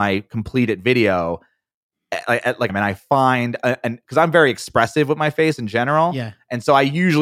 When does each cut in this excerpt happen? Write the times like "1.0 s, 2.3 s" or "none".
2.7 s